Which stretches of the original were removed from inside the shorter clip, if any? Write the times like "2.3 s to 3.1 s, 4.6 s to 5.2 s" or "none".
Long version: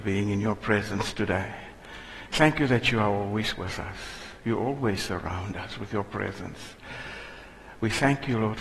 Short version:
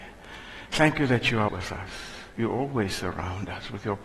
3.1 s to 3.6 s